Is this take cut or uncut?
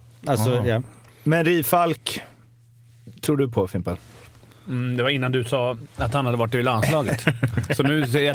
uncut